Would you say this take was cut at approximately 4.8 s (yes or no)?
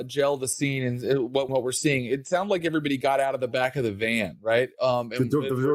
no